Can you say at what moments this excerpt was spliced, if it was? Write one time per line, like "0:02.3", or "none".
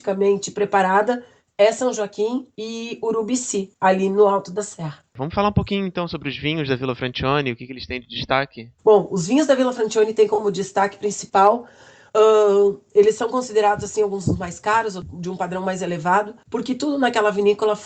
0:08.8